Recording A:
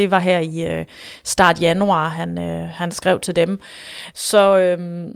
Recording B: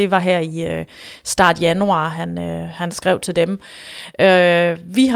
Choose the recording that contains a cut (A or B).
A